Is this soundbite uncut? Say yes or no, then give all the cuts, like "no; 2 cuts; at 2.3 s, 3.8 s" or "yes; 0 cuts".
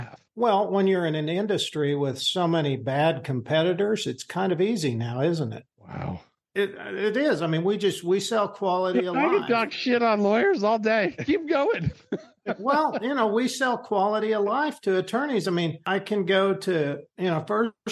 yes; 0 cuts